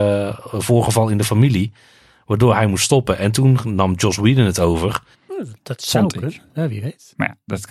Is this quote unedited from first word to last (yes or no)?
no